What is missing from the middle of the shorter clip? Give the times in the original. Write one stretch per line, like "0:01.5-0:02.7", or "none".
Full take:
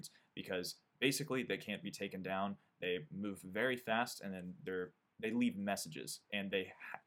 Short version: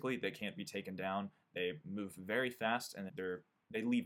0:04.3-0:04.6

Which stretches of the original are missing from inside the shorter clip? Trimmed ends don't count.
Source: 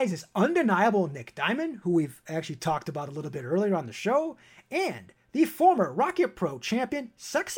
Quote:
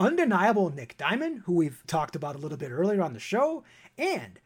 0:02.2-0:02.6

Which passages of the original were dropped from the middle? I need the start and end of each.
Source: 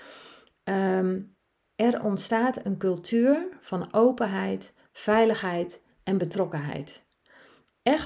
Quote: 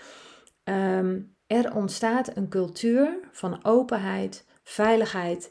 0:01.4-0:01.7

